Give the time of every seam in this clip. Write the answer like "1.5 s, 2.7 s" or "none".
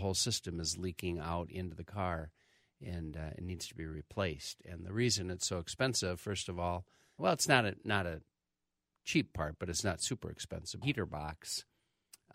7.2 s, 10.8 s